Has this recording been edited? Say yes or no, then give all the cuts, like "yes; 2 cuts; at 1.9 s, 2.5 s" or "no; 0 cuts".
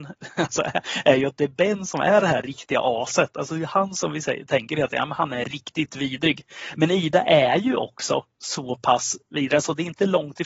no; 0 cuts